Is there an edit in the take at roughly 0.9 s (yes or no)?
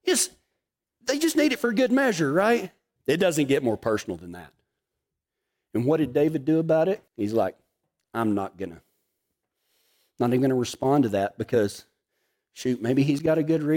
no